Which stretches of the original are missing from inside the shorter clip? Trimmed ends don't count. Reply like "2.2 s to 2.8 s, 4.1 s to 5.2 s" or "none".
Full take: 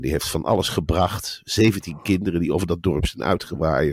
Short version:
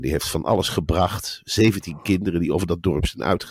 none